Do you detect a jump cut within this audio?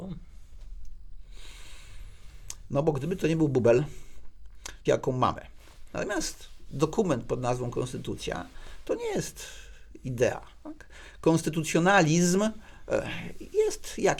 yes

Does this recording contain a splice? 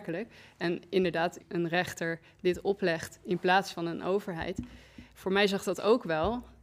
yes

